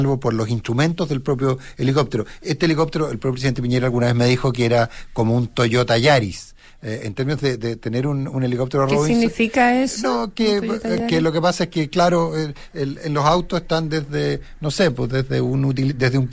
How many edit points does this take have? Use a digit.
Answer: 0